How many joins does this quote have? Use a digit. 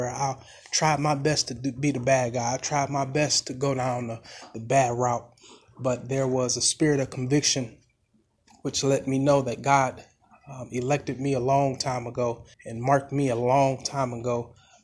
1